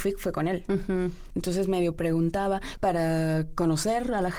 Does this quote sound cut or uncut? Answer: cut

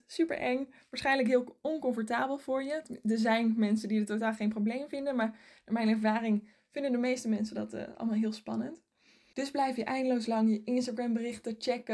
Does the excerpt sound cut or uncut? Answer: cut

